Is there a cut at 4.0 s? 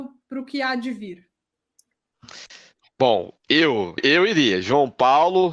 yes; 1 cut; at 4.0 s

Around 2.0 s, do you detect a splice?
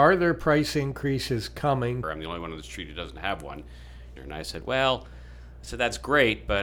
yes; 2 cuts; at 2.0 s, 4.2 s

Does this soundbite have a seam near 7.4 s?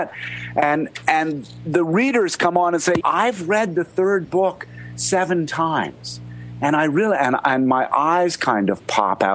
no; 1 cut; at 3.0 s

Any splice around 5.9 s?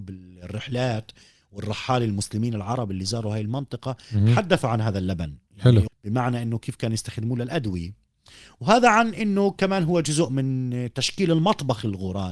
yes; 1 cut; at 5.9 s

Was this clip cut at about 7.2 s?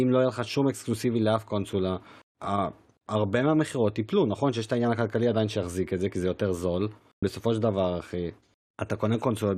yes; 1 cut; at 7.2 s

